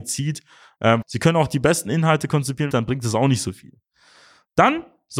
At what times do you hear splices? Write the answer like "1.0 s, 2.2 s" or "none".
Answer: 1.0 s, 2.7 s